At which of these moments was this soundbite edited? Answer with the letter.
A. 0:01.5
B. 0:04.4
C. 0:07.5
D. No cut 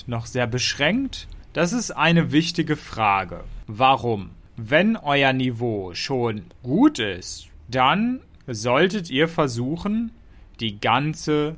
C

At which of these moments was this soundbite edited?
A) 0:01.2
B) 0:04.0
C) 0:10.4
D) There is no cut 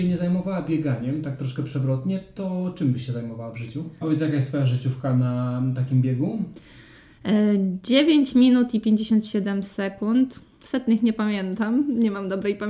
B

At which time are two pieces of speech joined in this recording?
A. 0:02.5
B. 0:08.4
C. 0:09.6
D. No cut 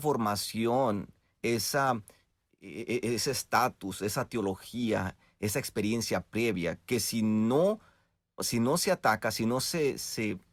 B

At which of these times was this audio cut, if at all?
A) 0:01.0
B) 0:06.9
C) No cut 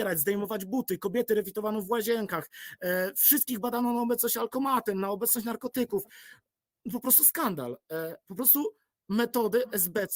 C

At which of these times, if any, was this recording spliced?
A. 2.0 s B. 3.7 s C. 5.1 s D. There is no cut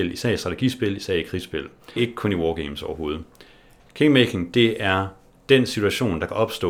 A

